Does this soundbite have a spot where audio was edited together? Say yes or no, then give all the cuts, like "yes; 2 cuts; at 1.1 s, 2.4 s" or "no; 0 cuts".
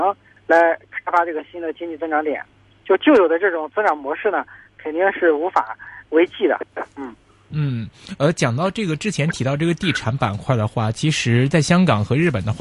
no; 0 cuts